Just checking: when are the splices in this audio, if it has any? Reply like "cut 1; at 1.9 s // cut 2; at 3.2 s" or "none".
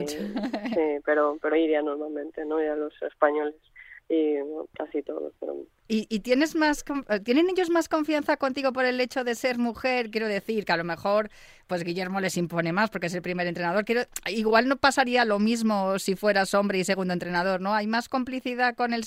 cut 1; at 1.5 s // cut 2; at 5.7 s